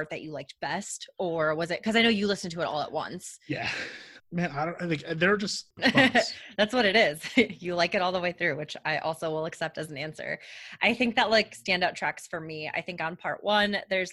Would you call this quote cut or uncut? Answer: cut